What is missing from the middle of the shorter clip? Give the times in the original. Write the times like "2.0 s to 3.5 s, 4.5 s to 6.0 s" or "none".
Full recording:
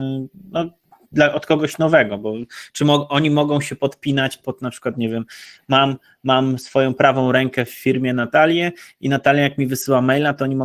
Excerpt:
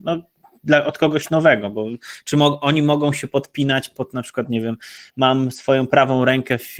5.6 s to 6.2 s